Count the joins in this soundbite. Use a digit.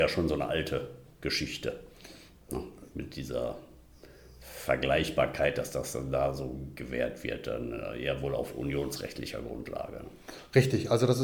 0